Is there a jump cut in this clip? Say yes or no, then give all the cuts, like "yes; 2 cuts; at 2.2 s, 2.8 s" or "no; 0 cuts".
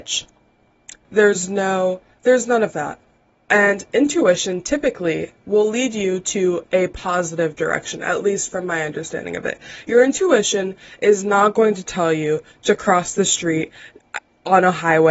yes; 1 cut; at 1.0 s